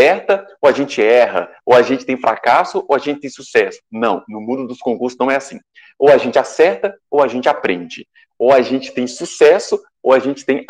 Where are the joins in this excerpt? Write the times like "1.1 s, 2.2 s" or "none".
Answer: none